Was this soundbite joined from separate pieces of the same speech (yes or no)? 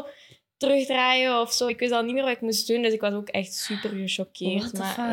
no